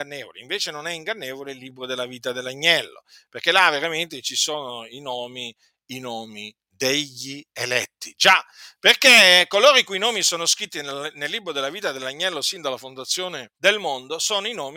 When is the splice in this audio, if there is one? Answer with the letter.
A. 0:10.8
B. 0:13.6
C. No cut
B